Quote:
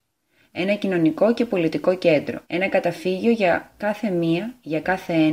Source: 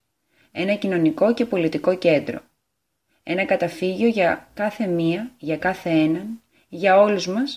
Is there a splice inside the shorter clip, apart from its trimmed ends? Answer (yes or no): yes